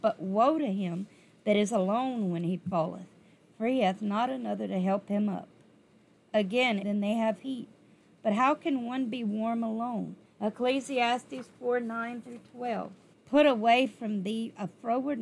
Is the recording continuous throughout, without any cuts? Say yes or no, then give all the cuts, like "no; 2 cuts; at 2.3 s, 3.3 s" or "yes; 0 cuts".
no; 3 cuts; at 6.8 s, 10.2 s, 13.1 s